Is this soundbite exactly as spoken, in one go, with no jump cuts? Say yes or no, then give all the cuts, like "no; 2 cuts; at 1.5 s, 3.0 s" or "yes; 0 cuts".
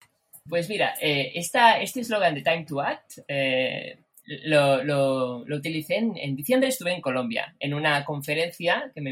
yes; 0 cuts